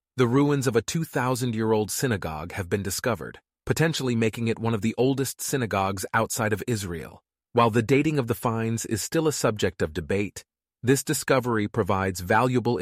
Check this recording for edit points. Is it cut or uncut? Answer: cut